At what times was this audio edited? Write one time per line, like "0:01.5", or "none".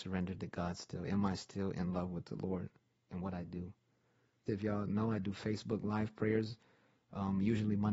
0:04.5